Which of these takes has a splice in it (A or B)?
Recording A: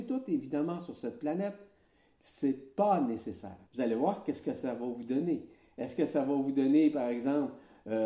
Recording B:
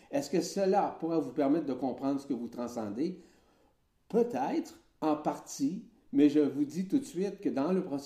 A